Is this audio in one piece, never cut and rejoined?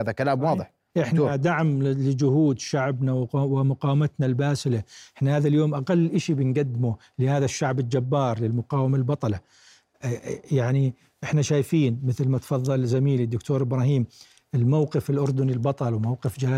yes; 0 cuts

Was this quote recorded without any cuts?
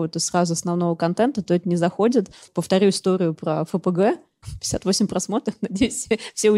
yes; 0 cuts

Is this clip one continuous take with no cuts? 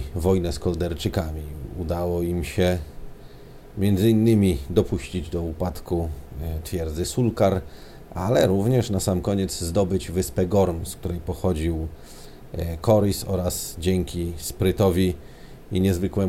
yes; 0 cuts

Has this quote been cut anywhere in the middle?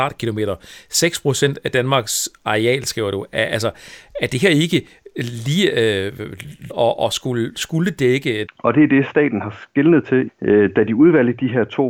yes; 3 cuts; at 6.7 s, 8.5 s, 10.3 s

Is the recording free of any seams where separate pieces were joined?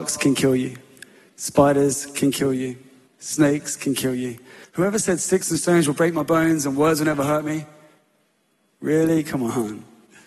no; 1 cut; at 4.6 s

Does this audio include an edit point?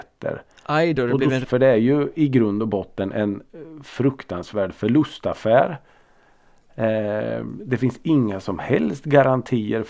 yes; 1 cut; at 1.4 s

